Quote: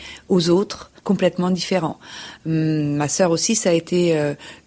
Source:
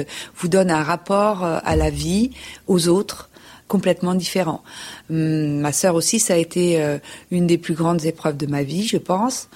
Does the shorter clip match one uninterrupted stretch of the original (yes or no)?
no